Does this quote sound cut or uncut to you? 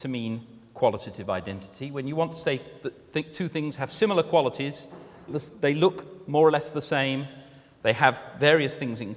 cut